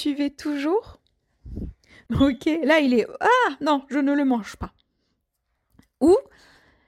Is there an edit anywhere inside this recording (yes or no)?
yes